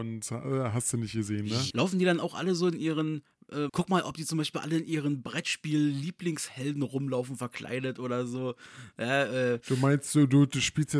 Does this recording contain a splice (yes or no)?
yes